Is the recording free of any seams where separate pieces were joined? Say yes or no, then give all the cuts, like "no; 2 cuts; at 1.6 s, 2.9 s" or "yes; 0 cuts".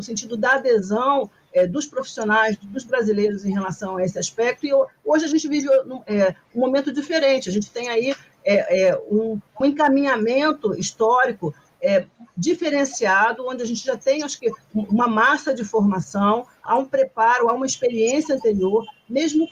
no; 2 cuts; at 9.6 s, 16.7 s